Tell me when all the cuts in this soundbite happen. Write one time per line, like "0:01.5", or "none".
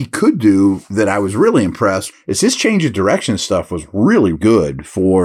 0:02.1
0:04.3